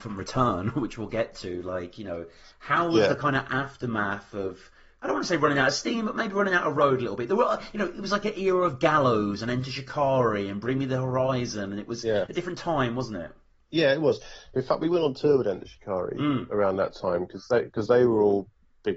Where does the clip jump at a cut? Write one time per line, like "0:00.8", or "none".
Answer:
none